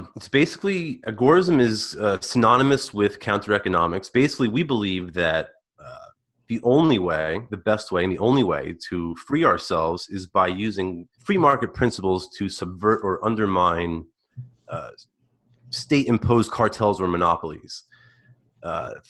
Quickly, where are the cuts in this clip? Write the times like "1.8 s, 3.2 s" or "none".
11.1 s